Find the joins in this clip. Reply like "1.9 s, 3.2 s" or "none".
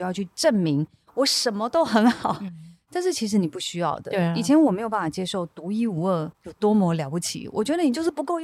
6.3 s

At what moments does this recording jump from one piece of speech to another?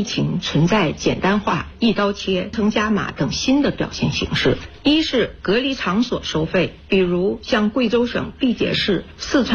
2.5 s

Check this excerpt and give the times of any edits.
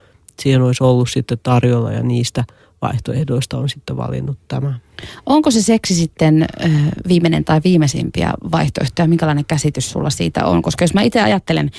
none

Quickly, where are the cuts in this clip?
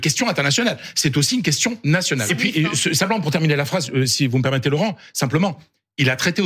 2.3 s

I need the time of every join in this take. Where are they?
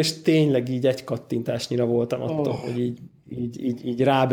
none

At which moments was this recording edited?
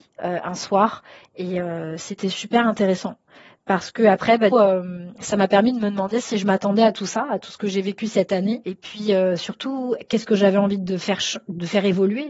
4.5 s

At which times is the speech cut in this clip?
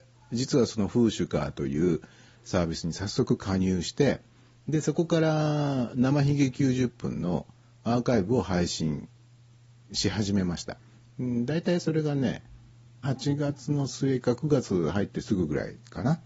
13.0 s

